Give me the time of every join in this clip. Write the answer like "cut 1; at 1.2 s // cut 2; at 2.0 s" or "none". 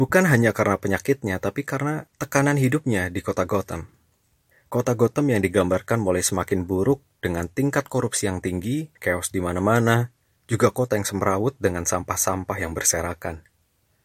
cut 1; at 9.0 s